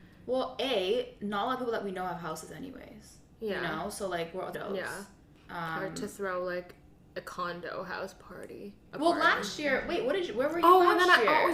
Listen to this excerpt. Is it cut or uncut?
cut